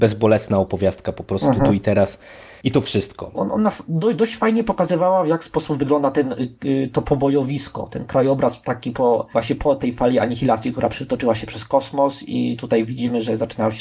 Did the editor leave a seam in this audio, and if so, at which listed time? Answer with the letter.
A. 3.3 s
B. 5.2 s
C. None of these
A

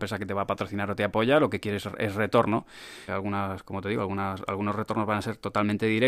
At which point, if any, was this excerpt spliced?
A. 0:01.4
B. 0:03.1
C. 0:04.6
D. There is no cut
B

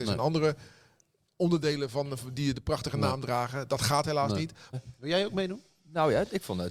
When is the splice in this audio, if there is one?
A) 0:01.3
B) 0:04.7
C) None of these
B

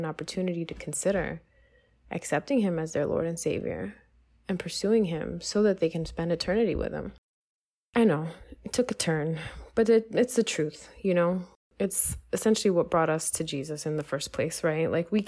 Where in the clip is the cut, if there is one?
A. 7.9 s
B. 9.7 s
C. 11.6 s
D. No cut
D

